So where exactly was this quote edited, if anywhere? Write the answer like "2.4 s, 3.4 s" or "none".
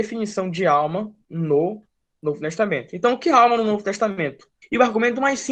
4.6 s